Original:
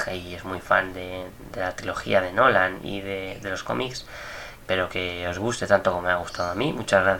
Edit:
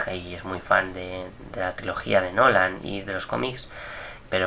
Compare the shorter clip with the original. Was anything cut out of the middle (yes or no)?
yes